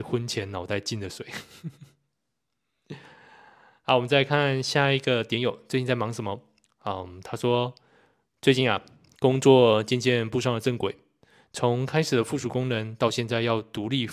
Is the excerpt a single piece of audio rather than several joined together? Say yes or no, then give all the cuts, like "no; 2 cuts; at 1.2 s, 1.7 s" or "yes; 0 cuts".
yes; 0 cuts